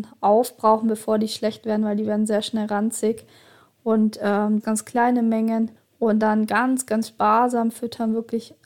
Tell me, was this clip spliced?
yes; 2 cuts; at 4.6 s, 5.8 s

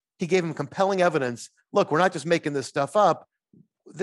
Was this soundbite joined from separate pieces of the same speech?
no; 0 cuts

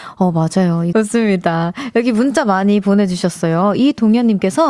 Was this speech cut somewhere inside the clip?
yes; 1 cut; at 0.9 s

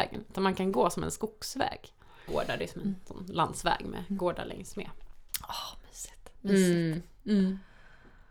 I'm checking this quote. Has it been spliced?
yes; 1 cut; at 2.3 s

